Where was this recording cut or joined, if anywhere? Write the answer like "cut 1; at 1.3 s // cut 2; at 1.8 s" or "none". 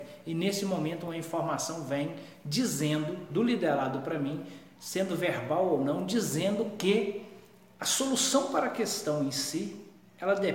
none